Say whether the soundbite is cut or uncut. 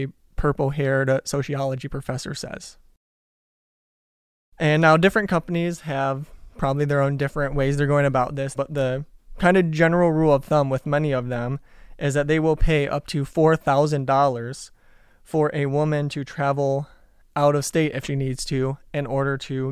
cut